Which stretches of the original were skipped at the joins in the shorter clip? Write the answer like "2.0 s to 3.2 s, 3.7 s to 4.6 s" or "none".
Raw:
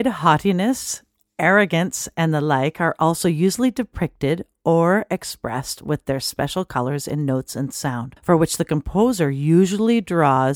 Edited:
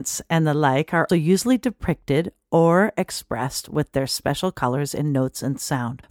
3.0 s to 3.2 s

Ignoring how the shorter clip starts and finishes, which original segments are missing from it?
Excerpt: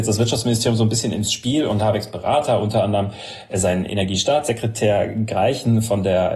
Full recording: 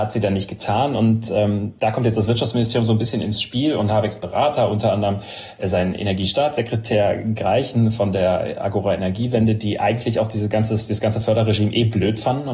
none

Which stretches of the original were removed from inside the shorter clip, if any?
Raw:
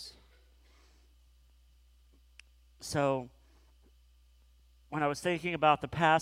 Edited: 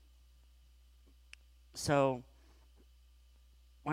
none

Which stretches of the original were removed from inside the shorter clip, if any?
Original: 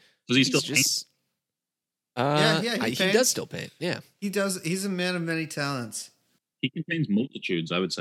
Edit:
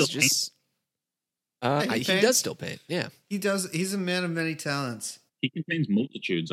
2.3 s to 2.7 s, 6.2 s to 6.5 s

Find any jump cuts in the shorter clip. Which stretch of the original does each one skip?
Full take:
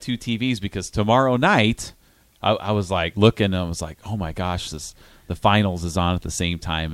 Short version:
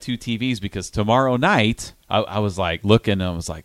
2.0 s to 2.3 s

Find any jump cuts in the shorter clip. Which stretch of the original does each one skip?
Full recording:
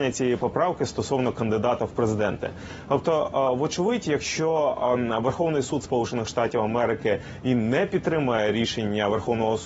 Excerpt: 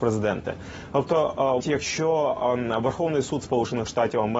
3.6 s to 4.0 s

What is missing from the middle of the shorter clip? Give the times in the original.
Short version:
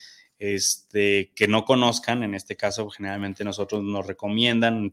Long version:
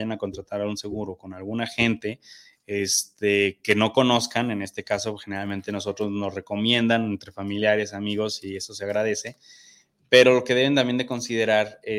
none

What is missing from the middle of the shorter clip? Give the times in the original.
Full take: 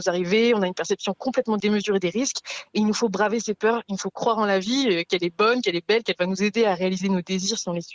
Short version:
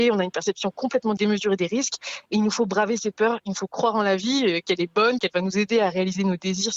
5.6 s to 6.0 s

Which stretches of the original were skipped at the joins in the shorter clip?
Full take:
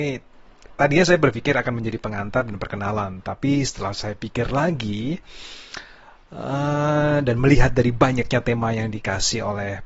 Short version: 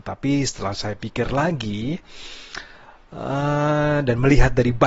none

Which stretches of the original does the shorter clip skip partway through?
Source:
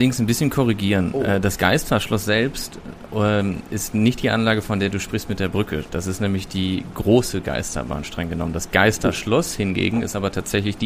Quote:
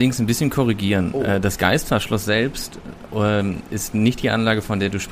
none

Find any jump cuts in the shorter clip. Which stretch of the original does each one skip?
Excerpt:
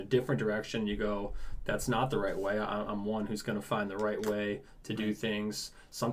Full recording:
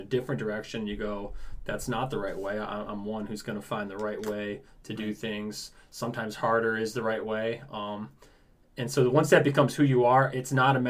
none

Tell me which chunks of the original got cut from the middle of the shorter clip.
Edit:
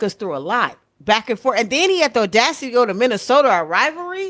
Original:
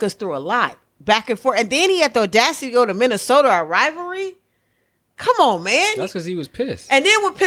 none

